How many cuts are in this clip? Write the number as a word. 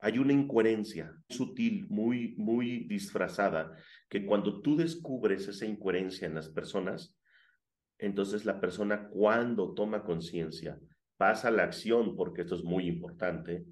one